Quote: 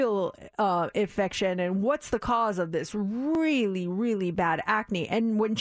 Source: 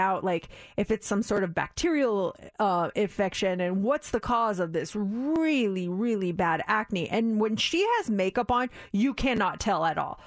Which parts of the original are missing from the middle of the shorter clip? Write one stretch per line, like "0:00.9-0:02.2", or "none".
none